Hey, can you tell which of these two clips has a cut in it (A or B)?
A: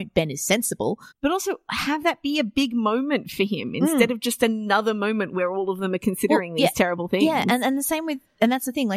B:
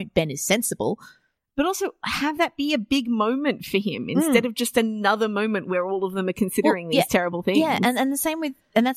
A